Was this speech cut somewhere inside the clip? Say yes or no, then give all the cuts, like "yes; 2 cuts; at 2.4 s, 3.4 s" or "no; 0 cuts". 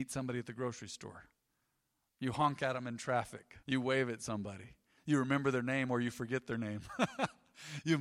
yes; 1 cut; at 3.6 s